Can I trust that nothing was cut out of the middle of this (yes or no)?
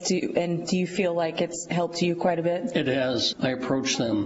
no